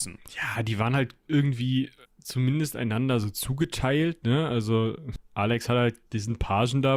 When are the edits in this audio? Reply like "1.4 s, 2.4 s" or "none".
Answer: 6.1 s